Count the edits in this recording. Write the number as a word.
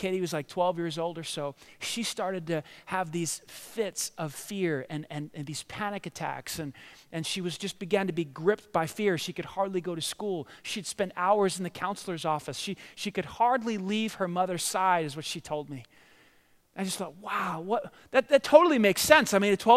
zero